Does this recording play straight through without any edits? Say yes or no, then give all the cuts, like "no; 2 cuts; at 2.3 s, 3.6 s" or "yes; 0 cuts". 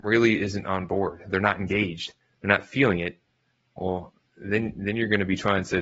yes; 0 cuts